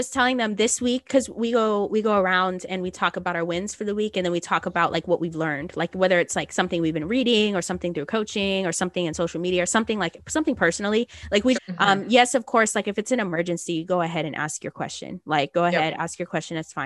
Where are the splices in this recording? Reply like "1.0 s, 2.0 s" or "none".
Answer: 11.5 s

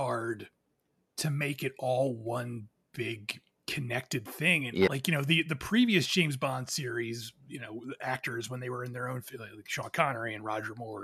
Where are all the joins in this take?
4.9 s

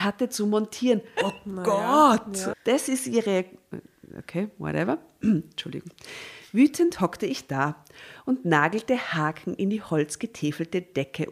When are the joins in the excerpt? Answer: 1.2 s, 2.5 s

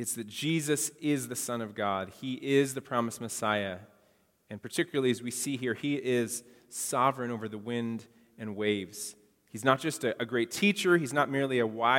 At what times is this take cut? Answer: none

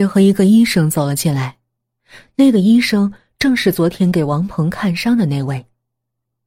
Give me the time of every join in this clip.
none

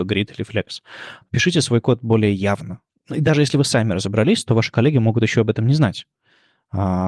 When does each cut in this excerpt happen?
2.9 s

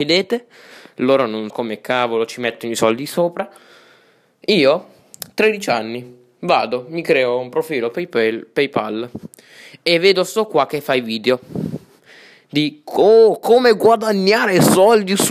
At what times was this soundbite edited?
1.5 s

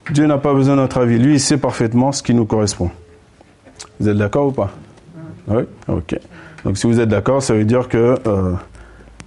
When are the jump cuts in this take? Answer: 5.8 s

